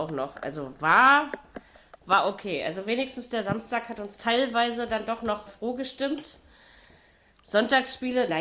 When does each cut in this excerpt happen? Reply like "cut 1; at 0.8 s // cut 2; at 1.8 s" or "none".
cut 1; at 5.5 s